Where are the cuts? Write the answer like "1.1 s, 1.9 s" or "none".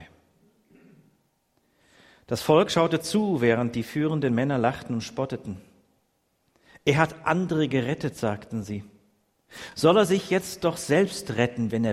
none